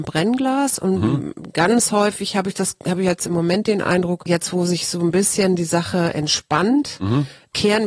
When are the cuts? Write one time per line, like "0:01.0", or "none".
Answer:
none

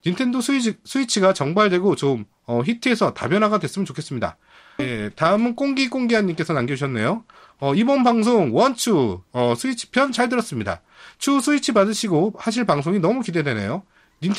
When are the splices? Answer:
0:04.8

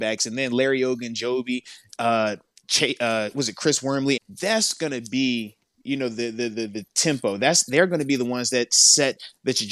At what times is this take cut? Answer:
0:04.2

